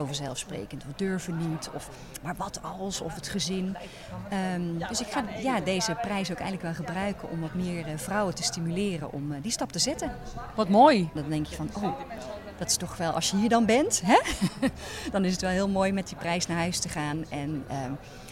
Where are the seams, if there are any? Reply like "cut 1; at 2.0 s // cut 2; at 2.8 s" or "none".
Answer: cut 1; at 11.2 s